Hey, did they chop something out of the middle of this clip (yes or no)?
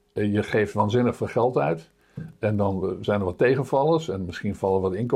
no